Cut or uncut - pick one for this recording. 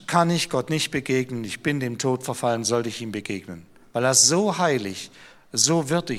uncut